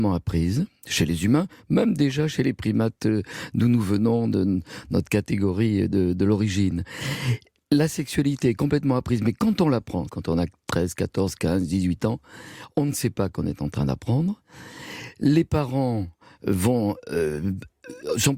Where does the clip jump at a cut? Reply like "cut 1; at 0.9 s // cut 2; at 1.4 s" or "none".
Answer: cut 1; at 10.1 s